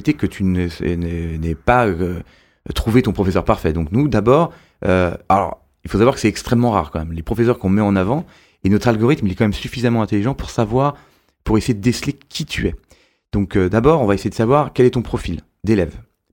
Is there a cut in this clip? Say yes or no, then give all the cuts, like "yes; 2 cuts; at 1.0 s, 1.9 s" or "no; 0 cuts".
no; 0 cuts